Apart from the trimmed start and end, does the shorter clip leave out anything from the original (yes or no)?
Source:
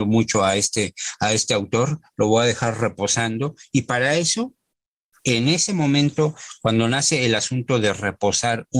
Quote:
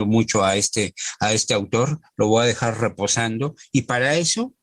no